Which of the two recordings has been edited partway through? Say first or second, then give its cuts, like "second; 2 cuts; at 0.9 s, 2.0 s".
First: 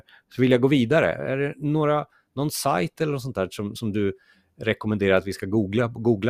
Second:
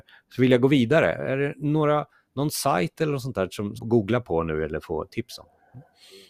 second; 1 cut; at 3.8 s